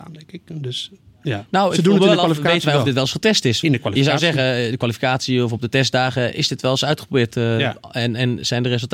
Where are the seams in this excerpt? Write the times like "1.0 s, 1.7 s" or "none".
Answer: 3.6 s